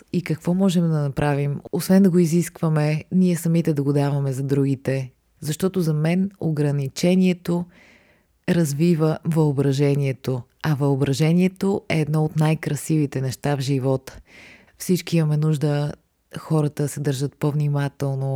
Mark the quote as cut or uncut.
cut